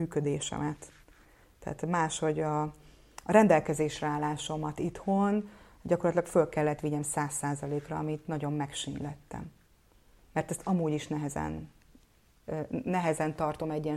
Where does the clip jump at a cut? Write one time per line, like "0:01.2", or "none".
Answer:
none